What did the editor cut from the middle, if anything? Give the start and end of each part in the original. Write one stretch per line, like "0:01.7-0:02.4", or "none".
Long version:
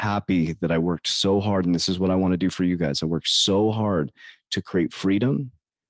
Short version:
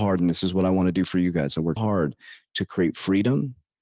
0:03.2-0:03.7